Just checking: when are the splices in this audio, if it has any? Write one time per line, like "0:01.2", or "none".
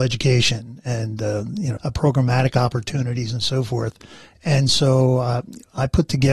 0:01.8